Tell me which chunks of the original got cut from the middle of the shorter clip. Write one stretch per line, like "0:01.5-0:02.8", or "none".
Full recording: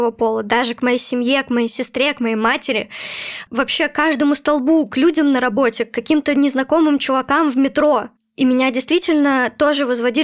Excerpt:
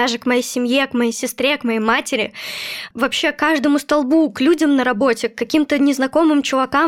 none